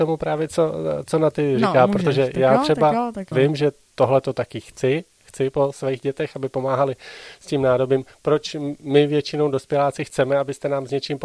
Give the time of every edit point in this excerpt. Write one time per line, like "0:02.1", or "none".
0:03.3